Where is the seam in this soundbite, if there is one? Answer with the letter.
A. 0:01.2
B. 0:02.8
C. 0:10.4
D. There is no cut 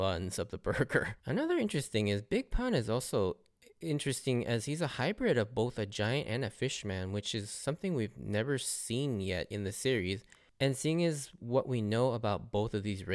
A